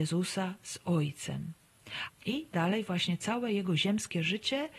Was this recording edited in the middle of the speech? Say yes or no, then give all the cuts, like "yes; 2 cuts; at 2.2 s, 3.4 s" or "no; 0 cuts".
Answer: yes; 1 cut; at 2.1 s